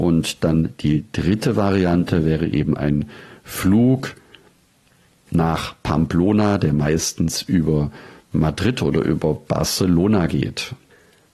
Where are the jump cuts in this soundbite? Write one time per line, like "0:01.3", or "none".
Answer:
none

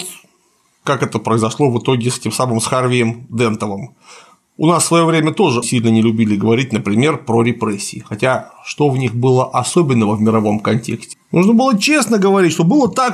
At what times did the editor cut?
0:05.6
0:11.1

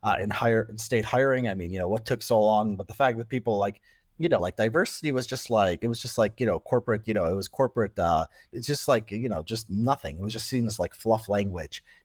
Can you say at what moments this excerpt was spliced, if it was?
0:04.4

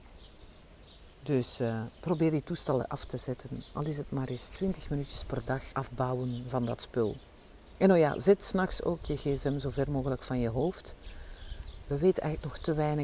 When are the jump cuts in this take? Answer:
0:05.7

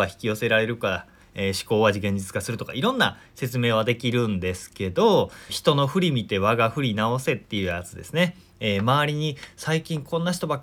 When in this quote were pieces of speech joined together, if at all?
0:05.5

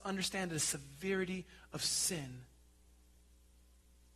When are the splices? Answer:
none

